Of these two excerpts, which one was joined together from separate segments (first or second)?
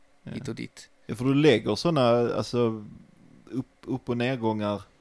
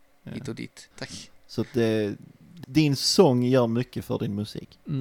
second